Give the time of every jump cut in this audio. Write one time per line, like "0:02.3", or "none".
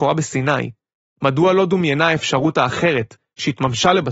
none